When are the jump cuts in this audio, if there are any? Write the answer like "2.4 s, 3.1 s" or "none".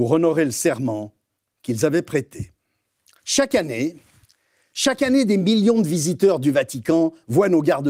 3.2 s